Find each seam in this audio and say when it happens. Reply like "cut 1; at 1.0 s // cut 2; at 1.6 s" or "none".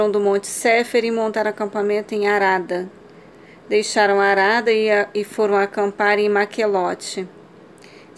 none